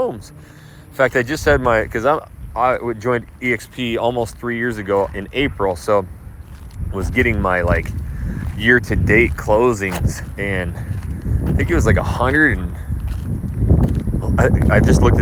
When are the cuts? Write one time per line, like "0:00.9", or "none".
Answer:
none